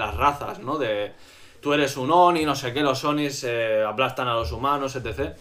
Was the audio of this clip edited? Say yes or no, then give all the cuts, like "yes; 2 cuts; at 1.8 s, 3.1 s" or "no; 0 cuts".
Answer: no; 0 cuts